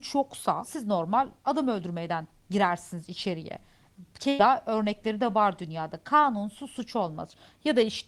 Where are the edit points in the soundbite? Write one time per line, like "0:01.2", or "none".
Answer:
none